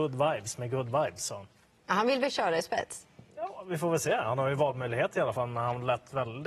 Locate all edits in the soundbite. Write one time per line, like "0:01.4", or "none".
0:03.3